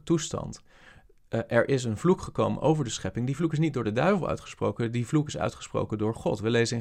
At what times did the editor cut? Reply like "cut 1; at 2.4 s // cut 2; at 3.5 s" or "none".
none